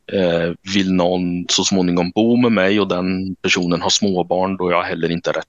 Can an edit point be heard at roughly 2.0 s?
no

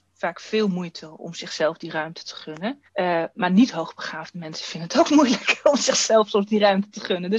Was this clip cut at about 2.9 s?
yes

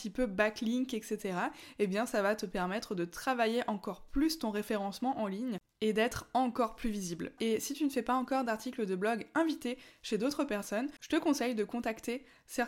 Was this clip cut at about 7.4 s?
yes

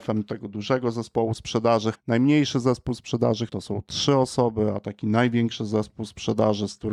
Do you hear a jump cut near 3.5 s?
yes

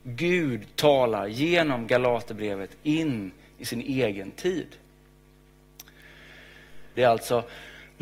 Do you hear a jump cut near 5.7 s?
no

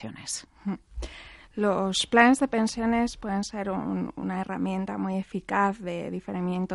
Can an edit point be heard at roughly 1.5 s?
no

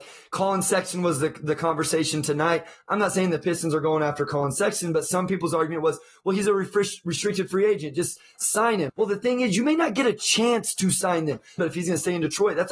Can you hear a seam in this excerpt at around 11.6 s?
yes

